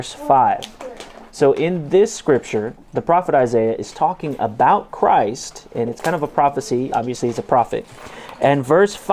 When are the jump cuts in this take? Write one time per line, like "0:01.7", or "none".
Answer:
none